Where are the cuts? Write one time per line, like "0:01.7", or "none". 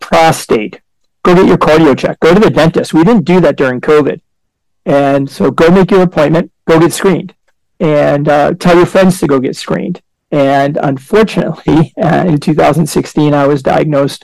0:06.6
0:10.1